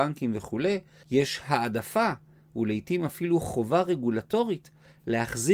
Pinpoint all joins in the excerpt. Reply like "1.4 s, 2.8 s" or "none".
1.0 s